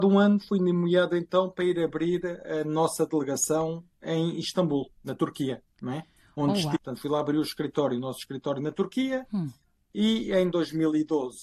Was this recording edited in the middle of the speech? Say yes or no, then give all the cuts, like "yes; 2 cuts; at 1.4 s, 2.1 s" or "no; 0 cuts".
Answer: yes; 1 cut; at 6.7 s